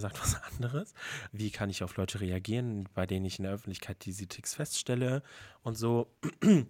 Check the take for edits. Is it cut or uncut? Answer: cut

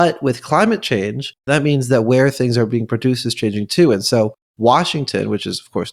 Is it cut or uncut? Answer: uncut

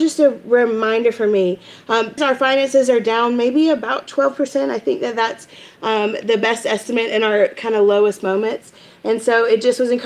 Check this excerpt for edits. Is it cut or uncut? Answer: cut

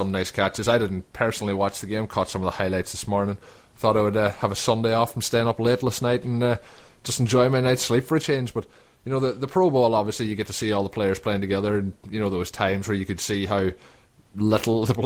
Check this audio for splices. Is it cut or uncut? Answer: uncut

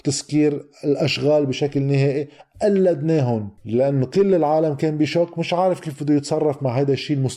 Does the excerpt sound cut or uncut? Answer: cut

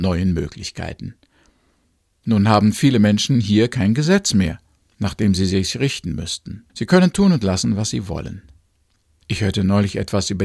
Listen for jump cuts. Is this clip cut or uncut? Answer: cut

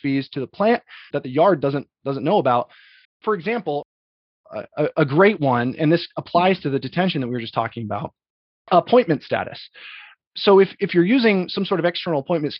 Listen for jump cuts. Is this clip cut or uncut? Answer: cut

